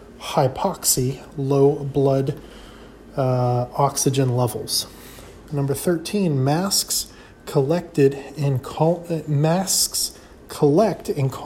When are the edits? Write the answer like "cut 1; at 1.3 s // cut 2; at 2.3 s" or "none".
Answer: cut 1; at 5.5 s